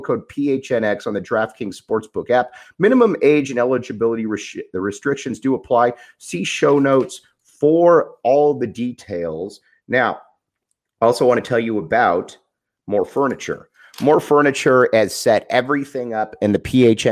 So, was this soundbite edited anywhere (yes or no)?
no